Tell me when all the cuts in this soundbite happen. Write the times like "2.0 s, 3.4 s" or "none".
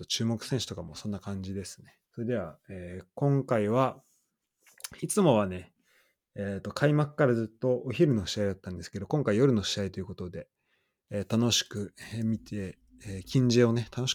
2.0 s